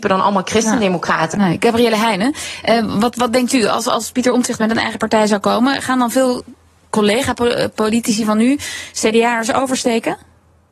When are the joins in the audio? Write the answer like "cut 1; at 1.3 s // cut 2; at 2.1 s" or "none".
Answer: cut 1; at 1.3 s